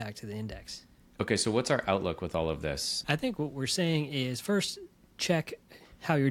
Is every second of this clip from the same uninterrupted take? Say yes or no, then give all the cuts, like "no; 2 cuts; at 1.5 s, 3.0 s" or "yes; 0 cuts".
no; 1 cut; at 3.0 s